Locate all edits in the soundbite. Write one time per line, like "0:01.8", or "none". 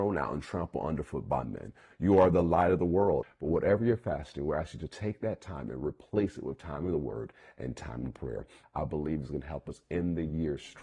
0:03.2
0:08.6